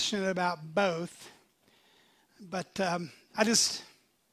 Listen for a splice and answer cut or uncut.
uncut